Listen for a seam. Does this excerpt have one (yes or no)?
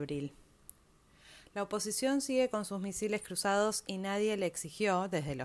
no